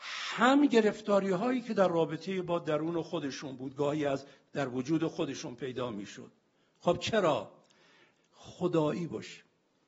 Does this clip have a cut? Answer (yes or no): yes